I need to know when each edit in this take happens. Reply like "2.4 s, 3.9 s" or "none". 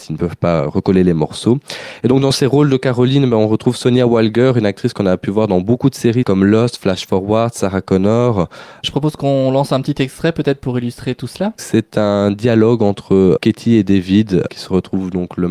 8.8 s